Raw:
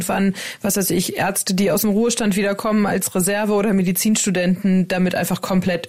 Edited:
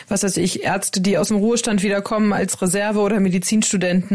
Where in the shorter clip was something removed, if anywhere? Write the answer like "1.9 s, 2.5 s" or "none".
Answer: none